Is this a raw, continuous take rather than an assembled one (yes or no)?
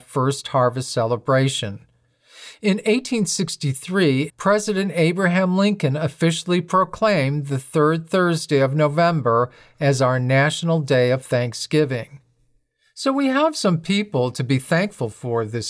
no